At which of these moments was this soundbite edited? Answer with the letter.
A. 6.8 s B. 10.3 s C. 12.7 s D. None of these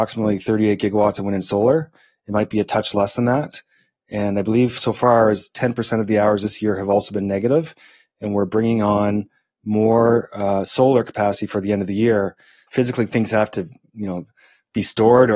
C